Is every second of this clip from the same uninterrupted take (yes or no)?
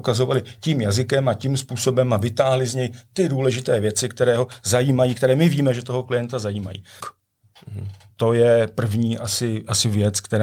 no